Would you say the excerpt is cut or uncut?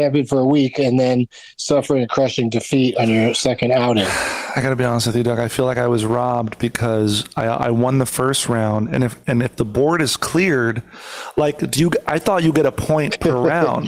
uncut